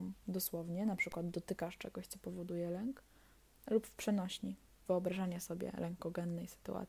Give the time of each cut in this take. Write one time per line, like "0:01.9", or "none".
none